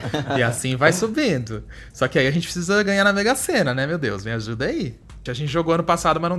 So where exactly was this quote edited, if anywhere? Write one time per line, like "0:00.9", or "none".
0:05.3